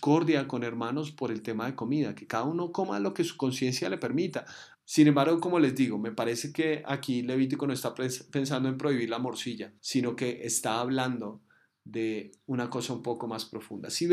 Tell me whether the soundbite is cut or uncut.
cut